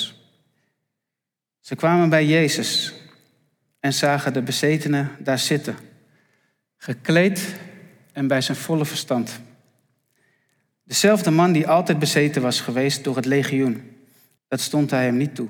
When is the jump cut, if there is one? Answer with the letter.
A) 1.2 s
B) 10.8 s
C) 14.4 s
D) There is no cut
C